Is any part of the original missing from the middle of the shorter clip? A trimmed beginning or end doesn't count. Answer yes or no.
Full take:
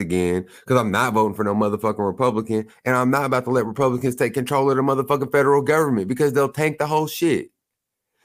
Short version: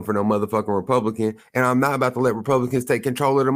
no